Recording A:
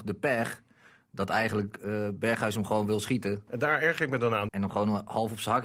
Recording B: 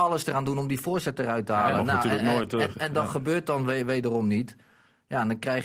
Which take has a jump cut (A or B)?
A